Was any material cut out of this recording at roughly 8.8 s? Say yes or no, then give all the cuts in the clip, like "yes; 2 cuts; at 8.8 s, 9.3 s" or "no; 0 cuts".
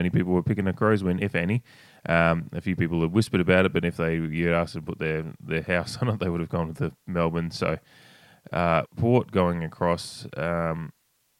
yes; 1 cut; at 8.8 s